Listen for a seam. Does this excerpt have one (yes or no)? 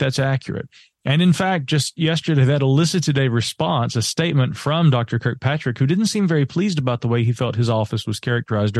no